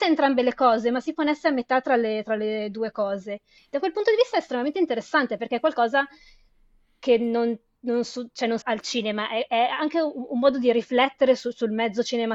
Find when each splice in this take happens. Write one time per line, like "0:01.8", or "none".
0:03.6
0:08.6